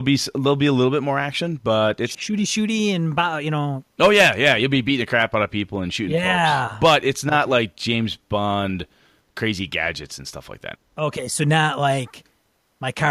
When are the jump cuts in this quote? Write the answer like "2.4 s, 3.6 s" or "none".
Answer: 2.1 s, 10.8 s

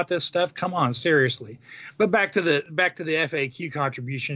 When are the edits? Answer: none

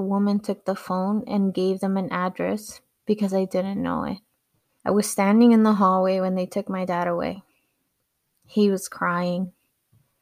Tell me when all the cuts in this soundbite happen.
4.8 s

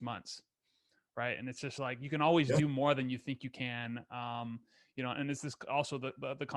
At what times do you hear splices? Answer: none

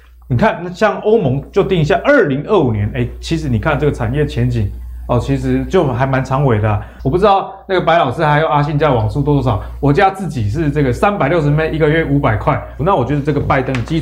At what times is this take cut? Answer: 7.0 s, 12.8 s

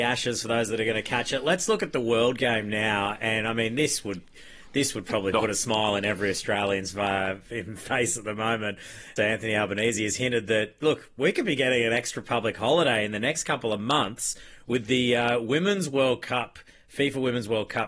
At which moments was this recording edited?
9.2 s

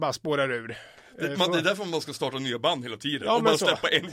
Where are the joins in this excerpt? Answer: none

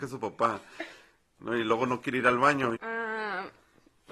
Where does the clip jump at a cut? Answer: 2.7 s

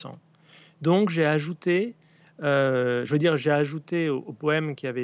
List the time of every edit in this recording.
none

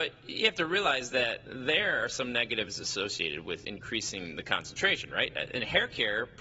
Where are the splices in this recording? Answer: none

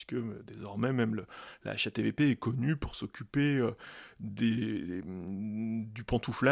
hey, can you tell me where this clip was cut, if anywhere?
none

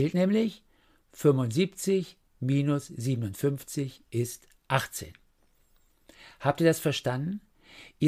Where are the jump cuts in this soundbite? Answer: none

